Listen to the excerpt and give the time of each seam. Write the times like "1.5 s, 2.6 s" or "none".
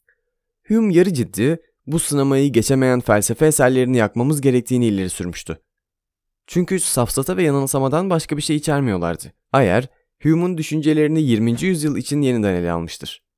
9.4 s